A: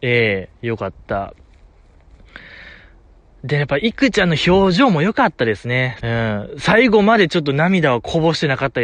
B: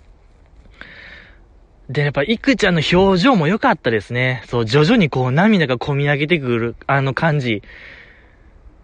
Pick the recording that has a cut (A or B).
A